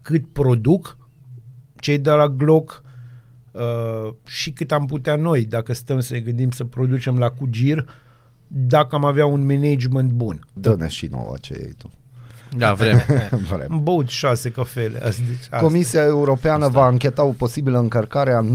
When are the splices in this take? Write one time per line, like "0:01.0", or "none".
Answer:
0:04.2
0:10.6